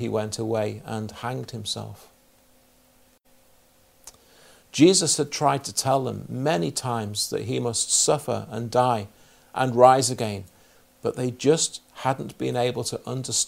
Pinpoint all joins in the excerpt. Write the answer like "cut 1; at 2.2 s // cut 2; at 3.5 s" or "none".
cut 1; at 4.6 s

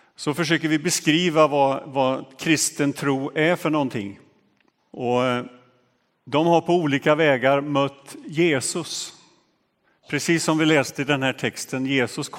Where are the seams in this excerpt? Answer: cut 1; at 4.8 s

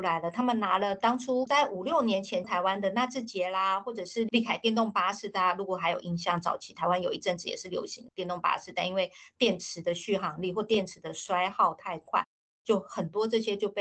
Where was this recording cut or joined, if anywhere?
cut 1; at 2.4 s

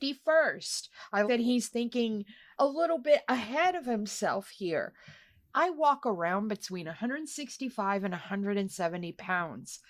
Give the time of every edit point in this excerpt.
cut 1; at 1.3 s // cut 2; at 5.5 s

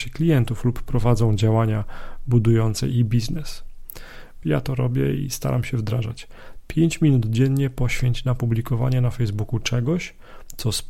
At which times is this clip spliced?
cut 1; at 4.4 s

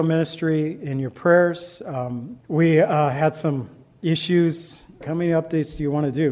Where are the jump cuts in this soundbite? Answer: cut 1; at 2.4 s // cut 2; at 5.0 s

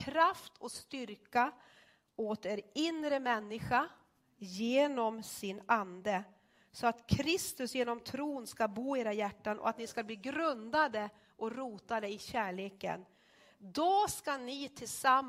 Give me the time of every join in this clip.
none

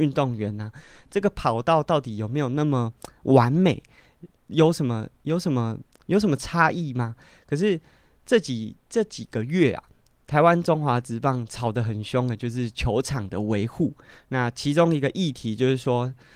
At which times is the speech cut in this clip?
none

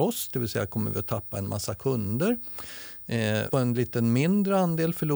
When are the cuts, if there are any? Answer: cut 1; at 3.5 s

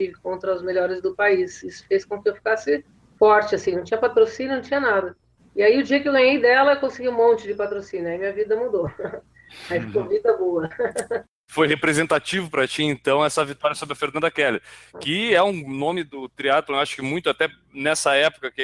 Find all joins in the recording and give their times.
none

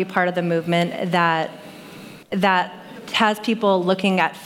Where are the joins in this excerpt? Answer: cut 1; at 2.2 s

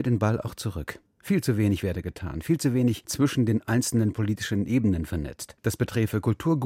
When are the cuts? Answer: cut 1; at 1.1 s

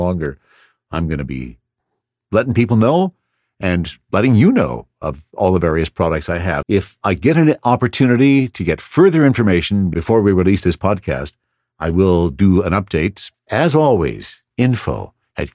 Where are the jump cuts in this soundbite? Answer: cut 1; at 6.6 s // cut 2; at 13.3 s // cut 3; at 14.5 s

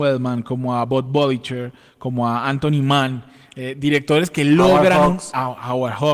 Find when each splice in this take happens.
none

